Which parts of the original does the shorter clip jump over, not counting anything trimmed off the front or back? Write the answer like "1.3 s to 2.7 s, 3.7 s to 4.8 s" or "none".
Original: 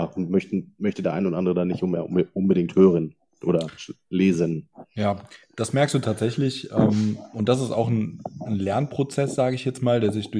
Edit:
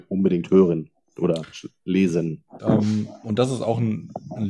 4.8 s to 6.7 s